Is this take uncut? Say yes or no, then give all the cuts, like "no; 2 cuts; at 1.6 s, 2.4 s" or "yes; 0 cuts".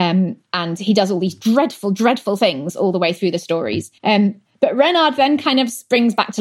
no; 1 cut; at 4.0 s